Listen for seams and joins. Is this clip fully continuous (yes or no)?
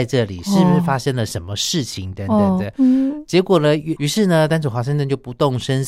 no